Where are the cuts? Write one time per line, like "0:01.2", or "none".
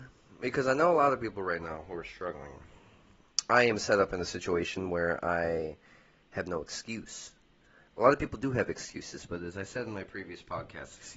none